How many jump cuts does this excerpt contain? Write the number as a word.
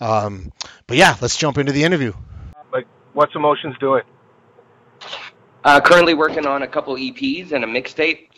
one